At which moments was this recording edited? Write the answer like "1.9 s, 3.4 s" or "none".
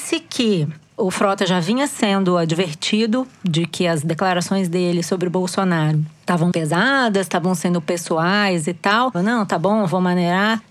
6.5 s, 9.1 s